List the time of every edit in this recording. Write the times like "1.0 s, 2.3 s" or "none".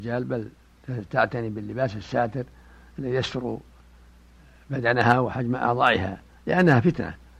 none